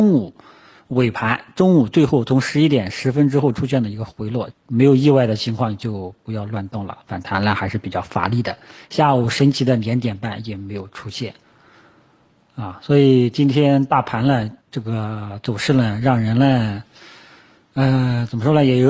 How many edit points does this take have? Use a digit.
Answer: 2